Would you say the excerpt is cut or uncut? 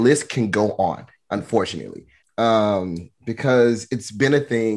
cut